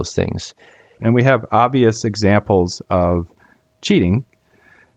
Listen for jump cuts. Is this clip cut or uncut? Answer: cut